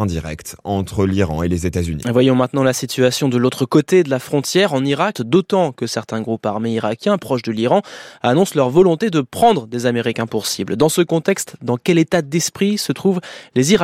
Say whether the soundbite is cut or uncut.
cut